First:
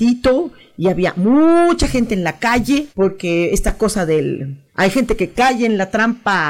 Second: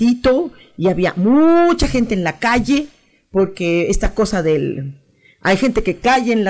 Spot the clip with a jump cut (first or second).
first